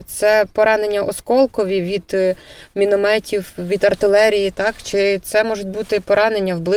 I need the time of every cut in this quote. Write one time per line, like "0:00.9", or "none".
none